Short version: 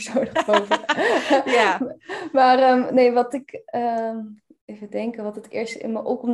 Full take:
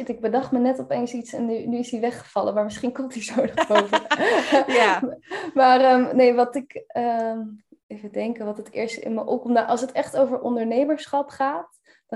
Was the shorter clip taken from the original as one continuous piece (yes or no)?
yes